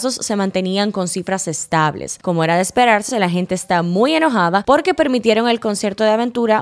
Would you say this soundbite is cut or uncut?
uncut